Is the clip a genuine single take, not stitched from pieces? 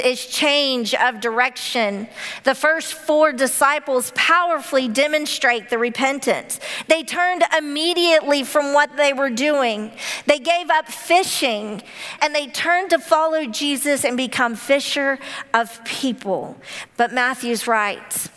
no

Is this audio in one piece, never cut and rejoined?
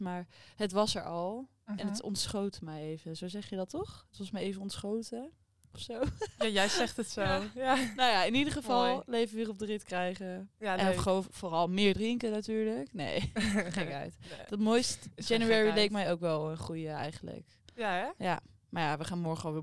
yes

